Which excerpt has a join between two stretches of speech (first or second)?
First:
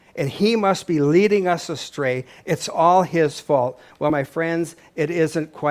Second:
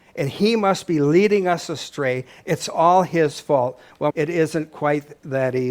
second